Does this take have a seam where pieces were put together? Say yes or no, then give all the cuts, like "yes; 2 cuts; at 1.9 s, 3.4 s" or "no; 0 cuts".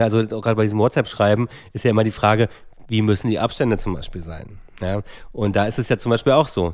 no; 0 cuts